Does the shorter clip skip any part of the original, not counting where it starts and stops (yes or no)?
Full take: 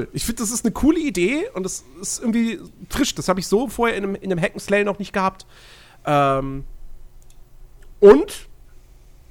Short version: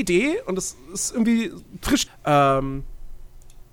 yes